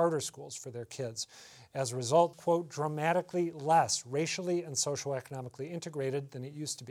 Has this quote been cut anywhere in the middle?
yes; 1 cut; at 2.3 s

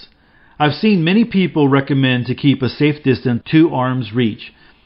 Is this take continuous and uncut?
no; 1 cut; at 3.4 s

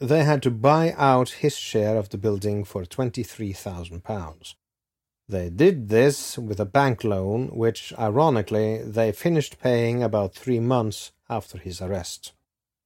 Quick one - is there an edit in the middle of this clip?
no; 0 cuts

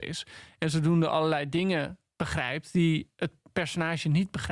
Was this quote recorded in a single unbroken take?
yes; 0 cuts

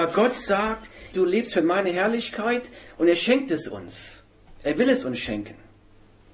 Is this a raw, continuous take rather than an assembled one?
no; 2 cuts; at 1.1 s, 2.8 s

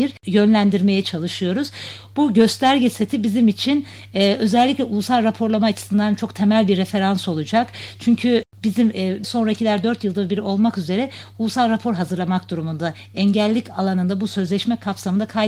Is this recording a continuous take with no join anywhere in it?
no; 1 cut; at 9.2 s

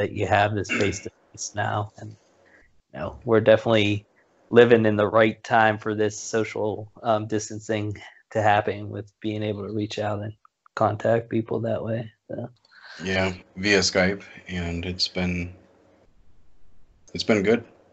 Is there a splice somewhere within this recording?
yes; 1 cut; at 13.4 s

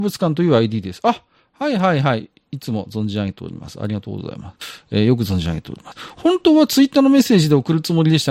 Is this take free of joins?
yes; 0 cuts

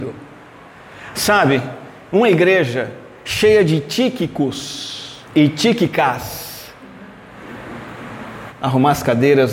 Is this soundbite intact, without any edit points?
no; 3 cuts; at 1.1 s, 5.2 s, 8.5 s

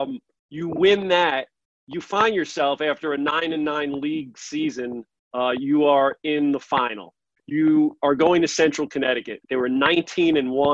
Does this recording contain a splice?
yes; 2 cuts; at 7.4 s, 9.4 s

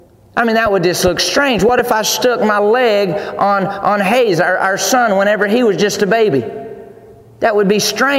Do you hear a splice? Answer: no; 0 cuts

